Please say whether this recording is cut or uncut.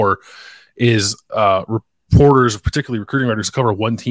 uncut